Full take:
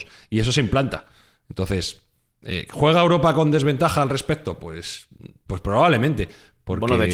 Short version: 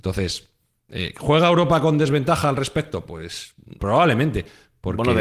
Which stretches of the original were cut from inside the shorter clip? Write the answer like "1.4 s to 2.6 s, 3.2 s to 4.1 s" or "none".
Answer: 5.3 s to 5.6 s